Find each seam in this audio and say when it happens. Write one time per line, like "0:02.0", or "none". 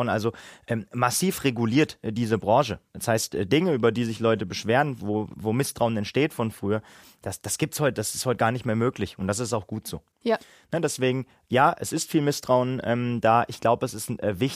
none